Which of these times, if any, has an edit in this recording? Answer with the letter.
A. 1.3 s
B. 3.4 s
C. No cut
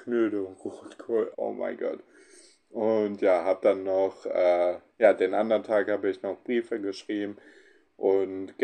A